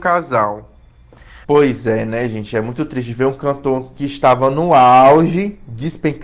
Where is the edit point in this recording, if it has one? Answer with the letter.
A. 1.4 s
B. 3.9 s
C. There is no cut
A